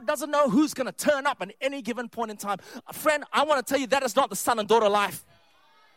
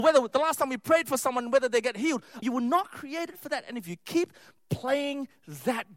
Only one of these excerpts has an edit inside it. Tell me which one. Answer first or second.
second